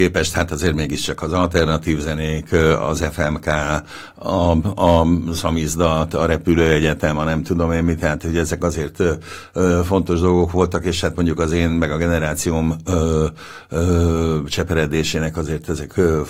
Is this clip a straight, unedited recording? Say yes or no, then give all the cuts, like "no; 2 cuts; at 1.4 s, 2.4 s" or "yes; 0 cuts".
yes; 0 cuts